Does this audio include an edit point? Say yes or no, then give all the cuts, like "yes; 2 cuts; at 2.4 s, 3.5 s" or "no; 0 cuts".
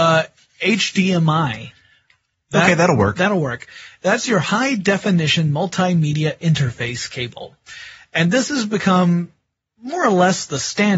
no; 0 cuts